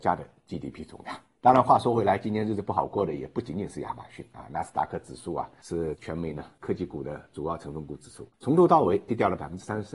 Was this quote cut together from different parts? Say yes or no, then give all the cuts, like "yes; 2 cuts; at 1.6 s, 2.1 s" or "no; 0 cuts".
no; 0 cuts